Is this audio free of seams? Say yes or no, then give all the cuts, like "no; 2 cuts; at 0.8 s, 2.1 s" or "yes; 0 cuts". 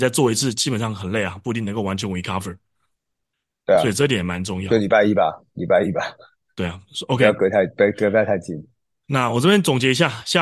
yes; 0 cuts